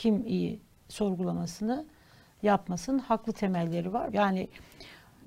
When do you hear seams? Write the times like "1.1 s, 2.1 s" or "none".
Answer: 4.1 s